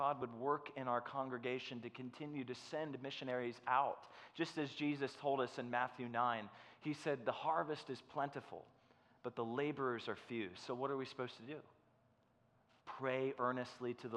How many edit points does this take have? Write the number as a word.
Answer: zero